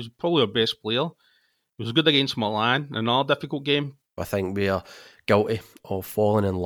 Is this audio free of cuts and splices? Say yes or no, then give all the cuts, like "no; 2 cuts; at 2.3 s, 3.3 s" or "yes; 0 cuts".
no; 1 cut; at 4.2 s